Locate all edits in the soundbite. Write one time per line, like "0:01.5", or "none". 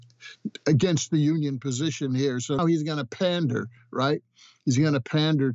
0:02.6